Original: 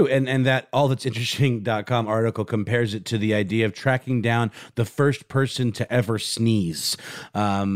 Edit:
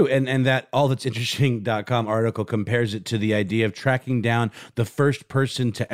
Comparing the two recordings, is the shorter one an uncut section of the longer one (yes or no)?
yes